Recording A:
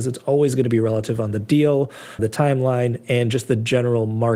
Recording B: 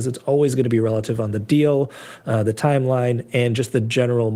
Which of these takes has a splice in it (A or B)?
A